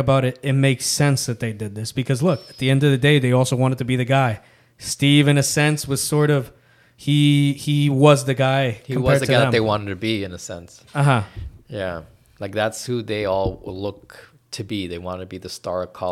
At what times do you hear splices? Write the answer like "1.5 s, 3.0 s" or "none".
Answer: none